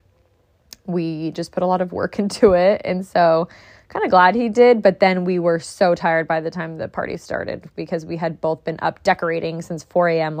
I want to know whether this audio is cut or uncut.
uncut